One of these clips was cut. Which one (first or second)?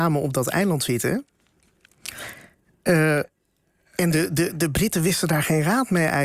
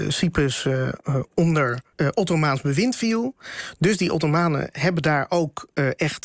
second